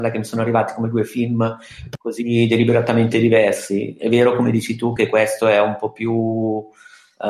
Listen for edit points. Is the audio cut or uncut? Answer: uncut